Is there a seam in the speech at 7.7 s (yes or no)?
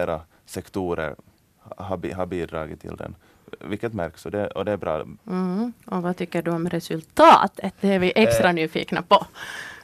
no